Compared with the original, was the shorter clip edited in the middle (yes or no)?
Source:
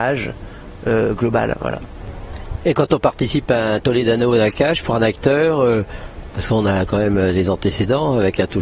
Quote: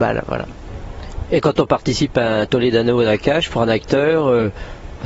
no